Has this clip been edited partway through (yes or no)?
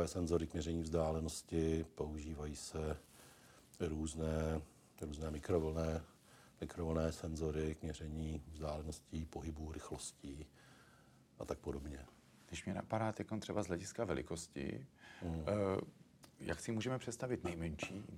no